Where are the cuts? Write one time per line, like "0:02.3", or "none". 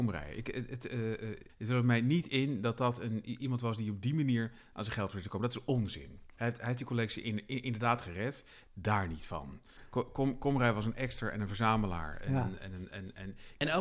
0:06.3
0:08.6